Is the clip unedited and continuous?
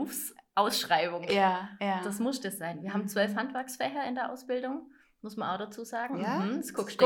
yes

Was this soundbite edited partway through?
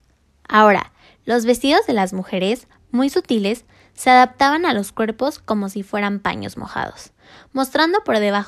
no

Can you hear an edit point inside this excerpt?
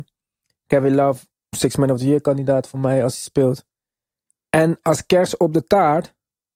no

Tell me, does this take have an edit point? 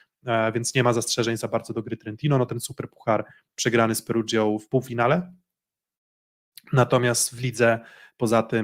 no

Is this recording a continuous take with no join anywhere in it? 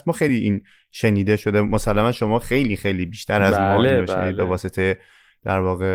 yes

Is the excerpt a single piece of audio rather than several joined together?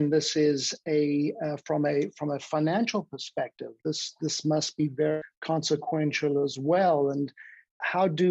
yes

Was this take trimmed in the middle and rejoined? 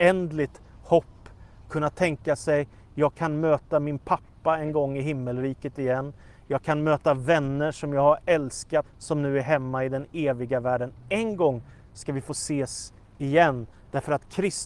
yes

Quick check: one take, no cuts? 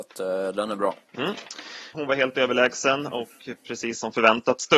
no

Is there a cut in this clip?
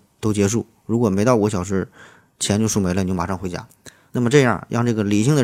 no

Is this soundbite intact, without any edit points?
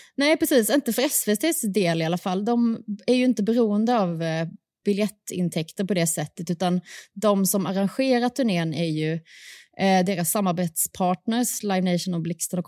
yes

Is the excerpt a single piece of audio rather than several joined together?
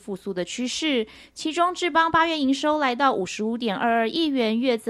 yes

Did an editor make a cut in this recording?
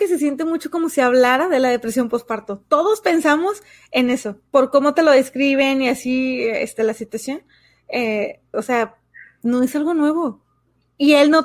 yes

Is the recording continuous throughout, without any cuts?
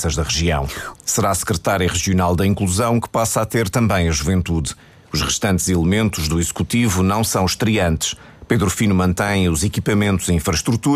no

